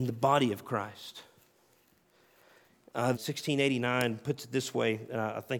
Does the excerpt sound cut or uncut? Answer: cut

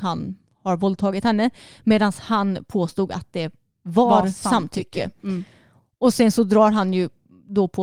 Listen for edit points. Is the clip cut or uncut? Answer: uncut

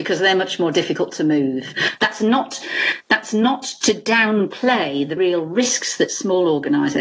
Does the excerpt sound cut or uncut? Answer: cut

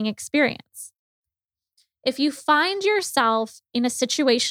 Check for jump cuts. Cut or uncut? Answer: uncut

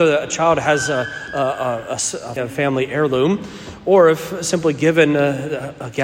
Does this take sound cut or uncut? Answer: cut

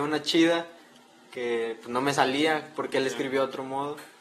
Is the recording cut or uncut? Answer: uncut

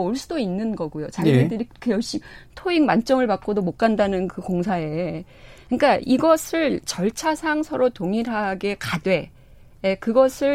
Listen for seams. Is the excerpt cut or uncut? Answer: uncut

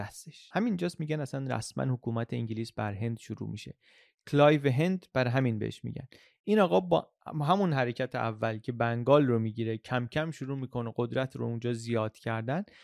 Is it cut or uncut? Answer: uncut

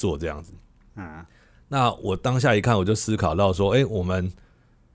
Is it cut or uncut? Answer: uncut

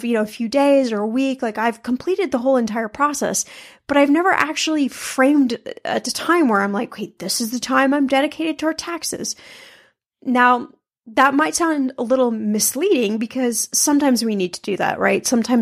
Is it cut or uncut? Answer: uncut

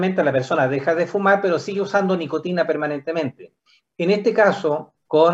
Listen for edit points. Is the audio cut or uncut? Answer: uncut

